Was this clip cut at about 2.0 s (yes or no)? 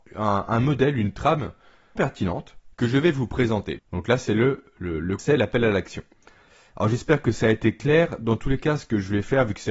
yes